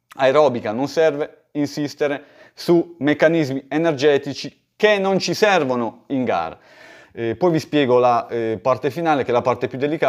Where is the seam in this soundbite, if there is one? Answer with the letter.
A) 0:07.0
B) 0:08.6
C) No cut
A